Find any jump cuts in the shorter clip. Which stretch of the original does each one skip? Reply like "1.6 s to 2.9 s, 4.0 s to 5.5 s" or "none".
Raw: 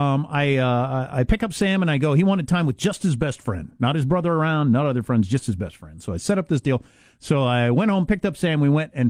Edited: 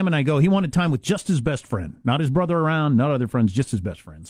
none

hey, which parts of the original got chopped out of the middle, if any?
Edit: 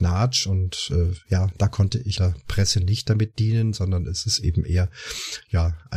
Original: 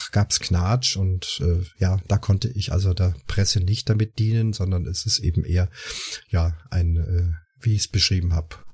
2.7 s to 3.0 s

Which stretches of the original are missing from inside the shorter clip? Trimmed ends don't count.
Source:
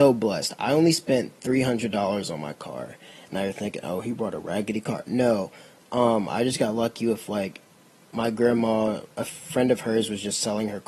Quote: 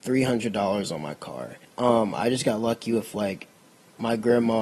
3.0 s to 5.8 s

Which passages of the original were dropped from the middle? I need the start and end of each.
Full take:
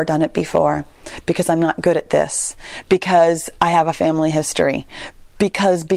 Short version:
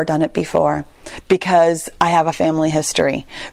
1.2 s to 2.8 s

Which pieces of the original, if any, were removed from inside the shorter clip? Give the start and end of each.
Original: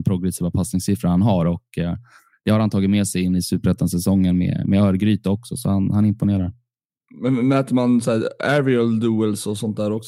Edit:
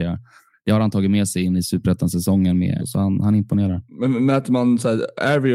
4.6 s to 5.5 s, 6.6 s to 7.1 s

